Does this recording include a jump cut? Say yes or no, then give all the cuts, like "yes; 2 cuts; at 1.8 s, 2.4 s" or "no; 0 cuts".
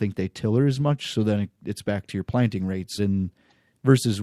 yes; 1 cut; at 3.0 s